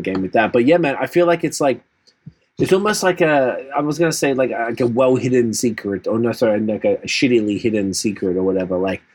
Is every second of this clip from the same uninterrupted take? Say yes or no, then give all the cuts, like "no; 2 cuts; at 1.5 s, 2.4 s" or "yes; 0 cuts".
yes; 0 cuts